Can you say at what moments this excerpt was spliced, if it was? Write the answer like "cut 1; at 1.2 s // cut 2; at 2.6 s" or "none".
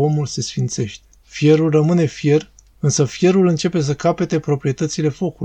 cut 1; at 1.2 s // cut 2; at 2.7 s